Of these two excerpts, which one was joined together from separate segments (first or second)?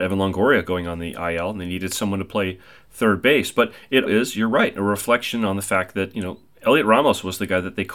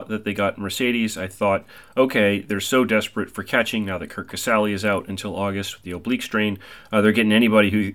first